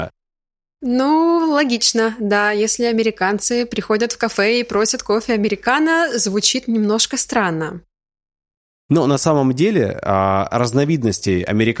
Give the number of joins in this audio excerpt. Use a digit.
0